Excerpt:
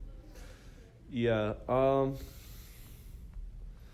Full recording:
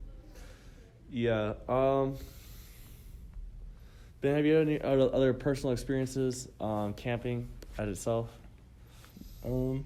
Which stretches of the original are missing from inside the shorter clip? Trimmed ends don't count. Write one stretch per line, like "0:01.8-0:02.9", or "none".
none

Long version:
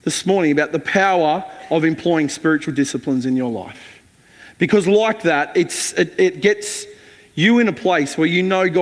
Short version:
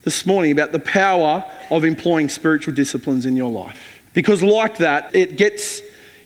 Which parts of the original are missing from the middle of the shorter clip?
0:04.1-0:04.5
0:05.5-0:06.1

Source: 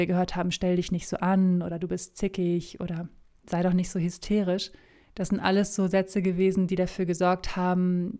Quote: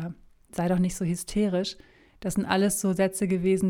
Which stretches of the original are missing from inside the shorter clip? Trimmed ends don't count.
none

